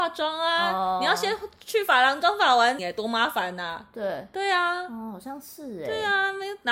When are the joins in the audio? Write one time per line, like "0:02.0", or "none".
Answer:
0:02.8